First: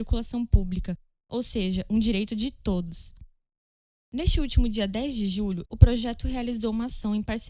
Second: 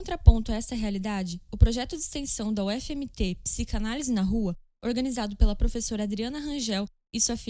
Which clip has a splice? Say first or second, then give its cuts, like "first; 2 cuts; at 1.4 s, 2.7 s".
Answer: first; 2 cuts; at 3.9 s, 5.6 s